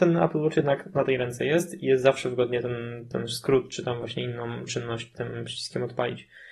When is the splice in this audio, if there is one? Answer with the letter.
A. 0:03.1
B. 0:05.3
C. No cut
A